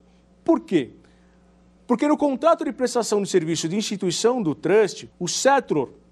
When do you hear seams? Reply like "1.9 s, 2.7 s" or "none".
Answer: 5.1 s